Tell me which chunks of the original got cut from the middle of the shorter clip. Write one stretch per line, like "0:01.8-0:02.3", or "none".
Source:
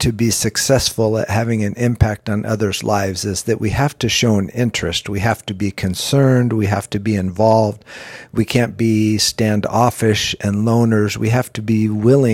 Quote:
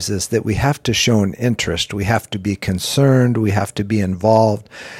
none